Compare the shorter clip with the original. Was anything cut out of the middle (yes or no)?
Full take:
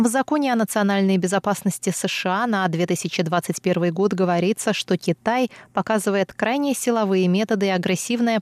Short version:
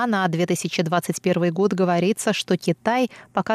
no